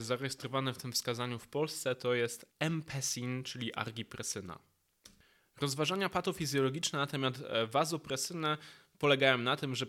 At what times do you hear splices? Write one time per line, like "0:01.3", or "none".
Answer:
0:02.5